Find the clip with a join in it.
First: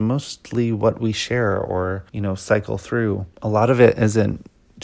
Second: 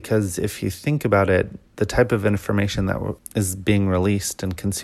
first; 2 cuts; at 2.1 s, 3.3 s

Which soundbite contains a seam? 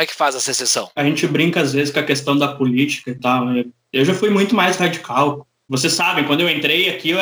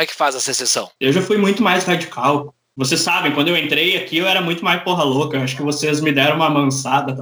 second; 1 cut; at 1.0 s

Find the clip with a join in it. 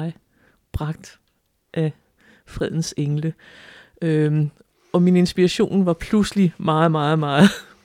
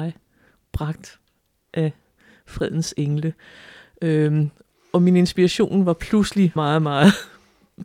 second; 1 cut; at 6.6 s

